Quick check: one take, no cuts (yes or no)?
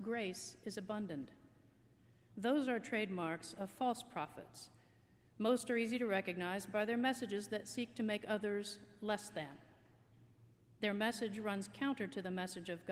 yes